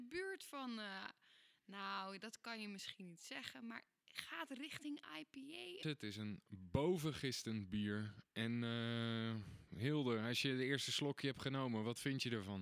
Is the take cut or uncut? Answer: cut